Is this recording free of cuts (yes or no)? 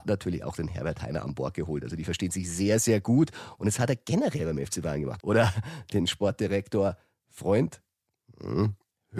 no